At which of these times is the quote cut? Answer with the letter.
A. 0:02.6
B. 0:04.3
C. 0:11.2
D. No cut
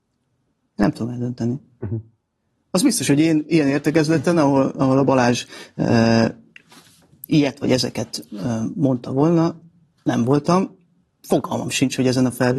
D